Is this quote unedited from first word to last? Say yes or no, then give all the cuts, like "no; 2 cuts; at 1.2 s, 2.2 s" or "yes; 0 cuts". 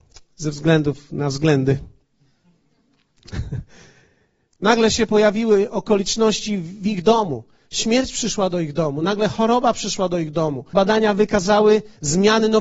no; 2 cuts; at 4.5 s, 10.7 s